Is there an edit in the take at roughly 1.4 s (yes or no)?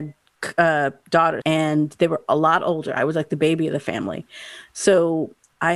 yes